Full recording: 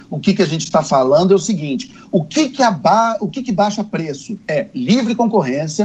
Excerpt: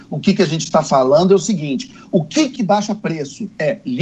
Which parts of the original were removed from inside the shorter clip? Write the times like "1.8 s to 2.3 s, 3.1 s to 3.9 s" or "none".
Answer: 2.6 s to 3.4 s